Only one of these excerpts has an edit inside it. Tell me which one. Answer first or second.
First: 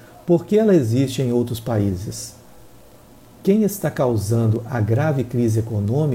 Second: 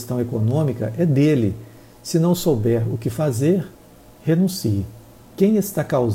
second